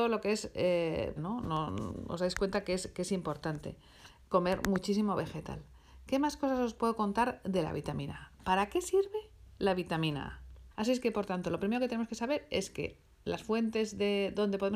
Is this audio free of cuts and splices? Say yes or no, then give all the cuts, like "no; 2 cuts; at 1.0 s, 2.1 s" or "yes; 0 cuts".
no; 2 cuts; at 1.2 s, 10.7 s